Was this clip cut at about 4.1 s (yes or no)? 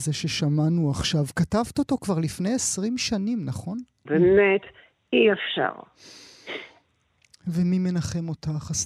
yes